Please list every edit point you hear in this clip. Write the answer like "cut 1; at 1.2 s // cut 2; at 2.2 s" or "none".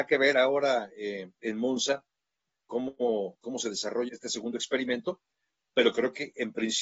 cut 1; at 4.1 s